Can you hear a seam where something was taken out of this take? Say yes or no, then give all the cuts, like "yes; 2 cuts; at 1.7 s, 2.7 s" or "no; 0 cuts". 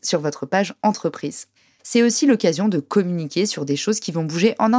no; 0 cuts